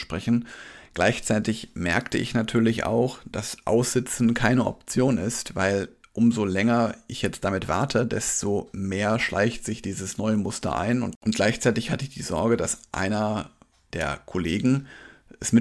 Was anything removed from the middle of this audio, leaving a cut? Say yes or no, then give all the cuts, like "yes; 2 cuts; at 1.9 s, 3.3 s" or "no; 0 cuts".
no; 0 cuts